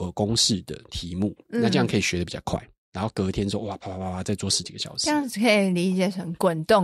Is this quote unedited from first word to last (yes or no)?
no